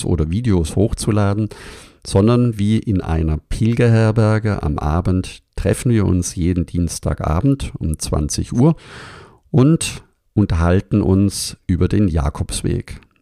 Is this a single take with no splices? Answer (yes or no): yes